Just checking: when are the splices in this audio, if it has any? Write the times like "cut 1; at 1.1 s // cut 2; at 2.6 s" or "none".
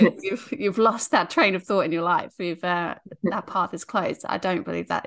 none